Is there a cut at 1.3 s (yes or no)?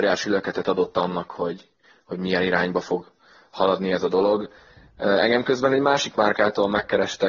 no